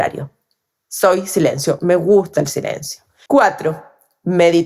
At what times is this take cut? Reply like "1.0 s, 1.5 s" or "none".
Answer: 3.3 s